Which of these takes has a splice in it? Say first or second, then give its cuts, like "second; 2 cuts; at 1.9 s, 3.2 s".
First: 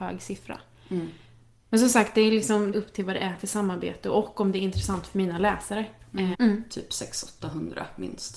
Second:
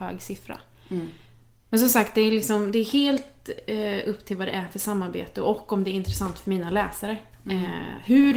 first; 2 cuts; at 2.7 s, 6.3 s